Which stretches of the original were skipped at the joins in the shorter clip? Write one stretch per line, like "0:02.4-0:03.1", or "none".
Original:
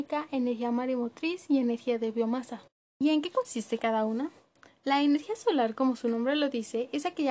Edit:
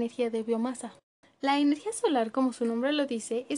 0:02.9-0:04.7